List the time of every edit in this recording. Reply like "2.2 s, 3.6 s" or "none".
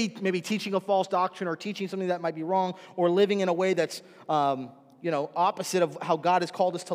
none

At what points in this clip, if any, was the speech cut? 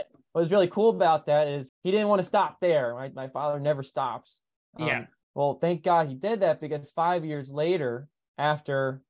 1.7 s, 5.2 s

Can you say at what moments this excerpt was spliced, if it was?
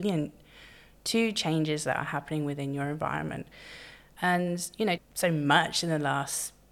5.0 s

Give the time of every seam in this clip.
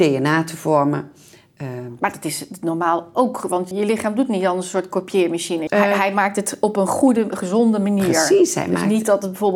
3.7 s, 5.7 s

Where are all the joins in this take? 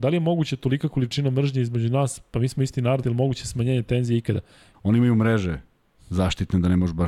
3.0 s, 4.7 s

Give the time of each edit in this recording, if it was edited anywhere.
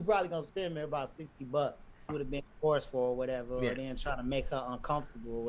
2.1 s

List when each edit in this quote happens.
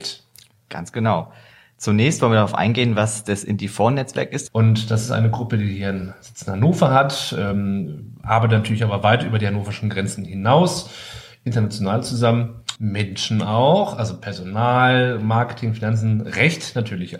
4.5 s, 12.8 s

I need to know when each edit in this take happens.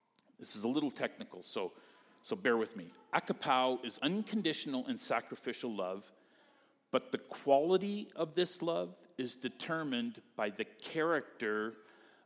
4.0 s

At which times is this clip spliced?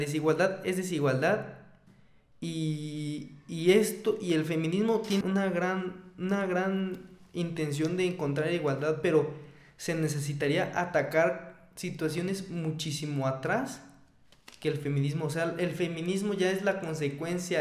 5.2 s

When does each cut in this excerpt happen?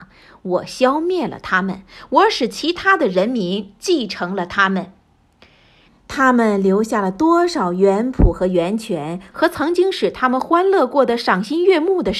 5.9 s, 9.3 s

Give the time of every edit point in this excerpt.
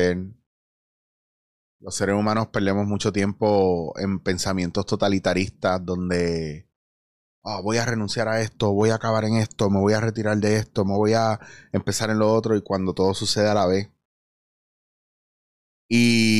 none

